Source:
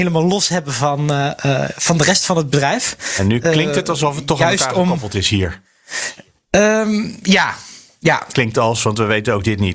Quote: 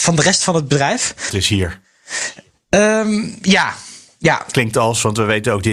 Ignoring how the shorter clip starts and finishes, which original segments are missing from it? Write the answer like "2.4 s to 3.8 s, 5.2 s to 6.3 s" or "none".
3.1 s to 5.1 s